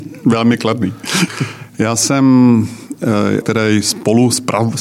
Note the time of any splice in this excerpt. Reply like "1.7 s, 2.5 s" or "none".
1.3 s, 3.4 s